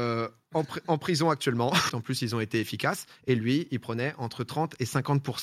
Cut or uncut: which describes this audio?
cut